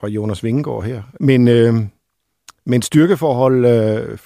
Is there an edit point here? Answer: yes; 1 cut; at 1.2 s

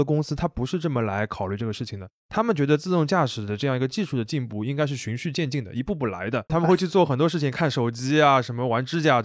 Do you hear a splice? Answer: yes; 1 cut; at 6.5 s

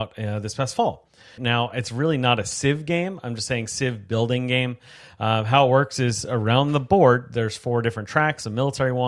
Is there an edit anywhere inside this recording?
yes; 1 cut; at 1.4 s

